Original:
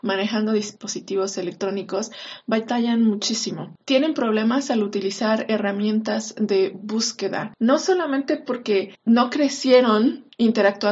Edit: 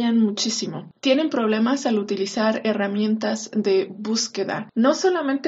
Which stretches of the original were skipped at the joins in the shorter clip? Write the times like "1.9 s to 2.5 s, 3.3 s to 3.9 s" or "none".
none

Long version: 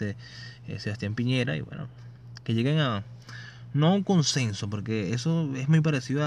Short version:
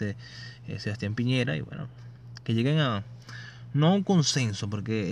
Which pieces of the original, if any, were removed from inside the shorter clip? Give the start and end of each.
none

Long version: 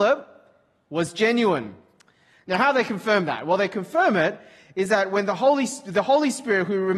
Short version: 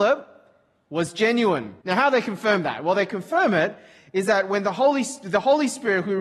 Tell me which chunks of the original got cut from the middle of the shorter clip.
1.8 s to 2.4 s

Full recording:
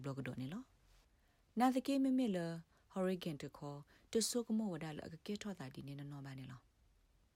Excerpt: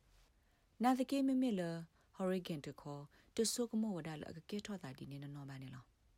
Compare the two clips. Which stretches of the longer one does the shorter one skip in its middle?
none

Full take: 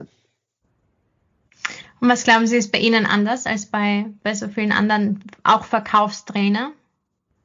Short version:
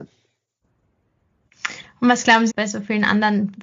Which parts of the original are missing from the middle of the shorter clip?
2.5 s to 4.2 s

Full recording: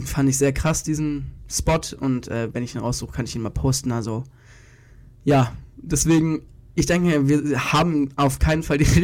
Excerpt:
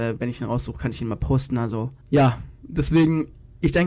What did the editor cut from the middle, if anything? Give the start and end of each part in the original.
4.3 s to 5.1 s

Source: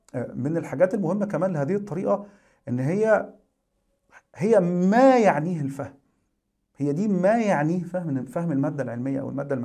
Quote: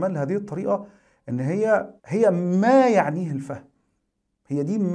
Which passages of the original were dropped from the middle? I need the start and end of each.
3.4 s to 4.3 s

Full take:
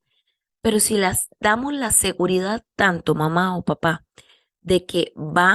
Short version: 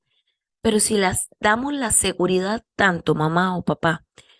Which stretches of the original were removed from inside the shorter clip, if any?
none

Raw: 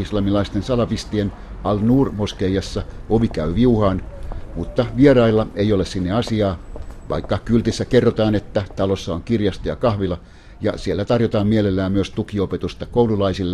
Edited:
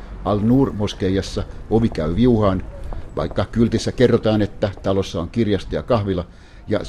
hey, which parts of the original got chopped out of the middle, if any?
4.5 s to 7.0 s

